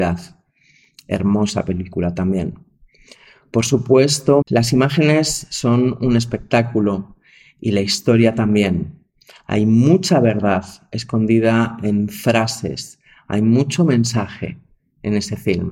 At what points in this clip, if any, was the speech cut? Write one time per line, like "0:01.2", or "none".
0:04.4